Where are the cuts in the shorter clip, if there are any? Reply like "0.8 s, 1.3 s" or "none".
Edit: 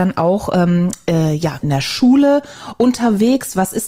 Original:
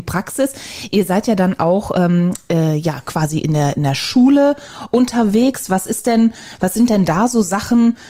1.6 s